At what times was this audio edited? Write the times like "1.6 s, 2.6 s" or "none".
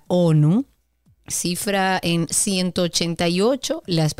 1.3 s